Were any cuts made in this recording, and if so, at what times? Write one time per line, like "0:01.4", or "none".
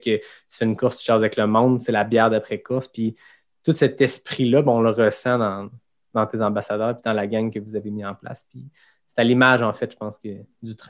none